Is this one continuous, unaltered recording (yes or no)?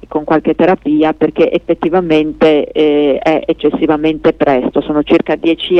yes